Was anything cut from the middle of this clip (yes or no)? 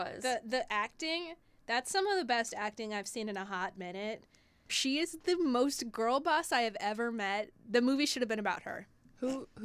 yes